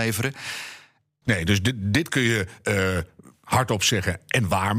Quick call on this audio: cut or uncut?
cut